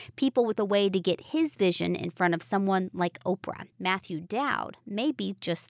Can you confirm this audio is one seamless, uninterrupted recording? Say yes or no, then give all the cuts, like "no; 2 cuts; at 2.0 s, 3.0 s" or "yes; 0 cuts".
no; 1 cut; at 3.7 s